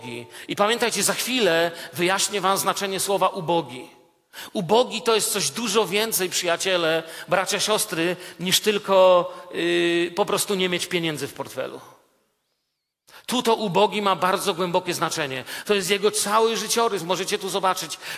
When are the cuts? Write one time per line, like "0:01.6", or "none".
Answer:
0:15.6

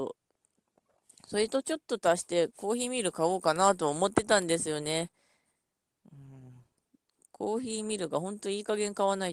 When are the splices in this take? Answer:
none

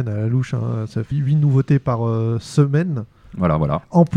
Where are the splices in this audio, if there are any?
0:01.1

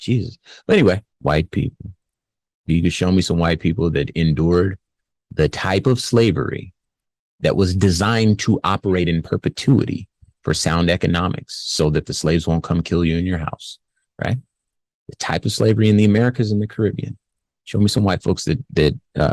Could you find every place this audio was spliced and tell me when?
0:01.1

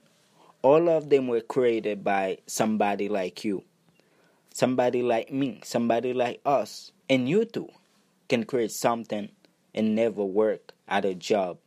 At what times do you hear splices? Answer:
0:07.0

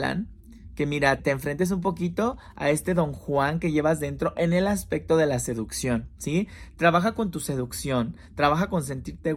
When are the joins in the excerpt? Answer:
0:01.2

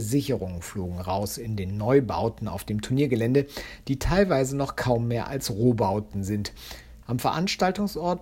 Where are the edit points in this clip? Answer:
0:07.0

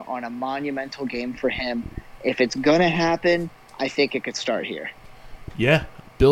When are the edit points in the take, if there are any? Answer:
none

